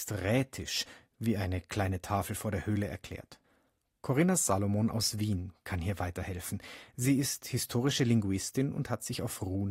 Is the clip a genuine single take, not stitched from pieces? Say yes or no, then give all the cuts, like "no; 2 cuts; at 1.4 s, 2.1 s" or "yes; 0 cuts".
yes; 0 cuts